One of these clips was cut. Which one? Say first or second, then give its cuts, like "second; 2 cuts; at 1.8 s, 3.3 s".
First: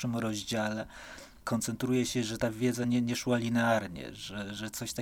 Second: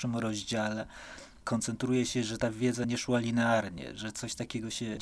second; 2 cuts; at 2.8 s, 4.0 s